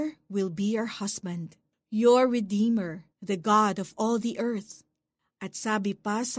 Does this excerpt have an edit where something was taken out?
yes; 1 cut; at 3.1 s

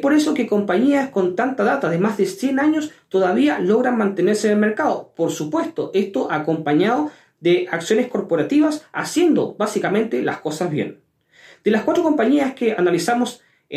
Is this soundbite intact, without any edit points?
yes; 0 cuts

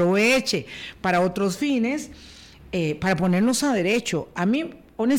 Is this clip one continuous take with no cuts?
yes; 0 cuts

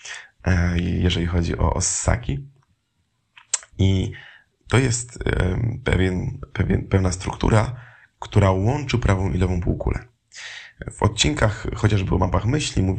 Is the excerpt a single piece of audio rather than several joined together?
yes; 0 cuts

